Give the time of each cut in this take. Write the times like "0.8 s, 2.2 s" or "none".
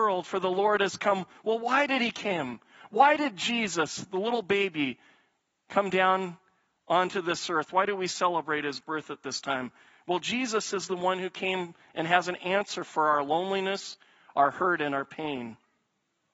none